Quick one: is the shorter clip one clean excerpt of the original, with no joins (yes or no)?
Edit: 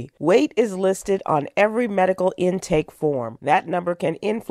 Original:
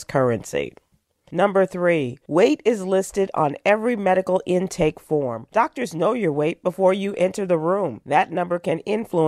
no